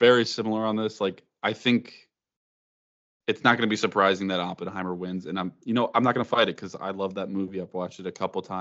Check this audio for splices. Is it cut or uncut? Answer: uncut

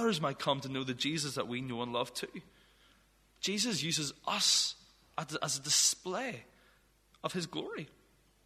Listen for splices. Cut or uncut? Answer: uncut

